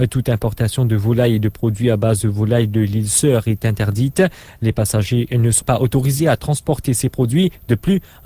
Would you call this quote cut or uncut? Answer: cut